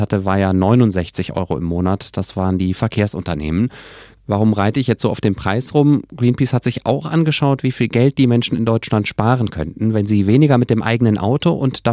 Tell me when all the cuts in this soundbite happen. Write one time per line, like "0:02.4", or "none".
none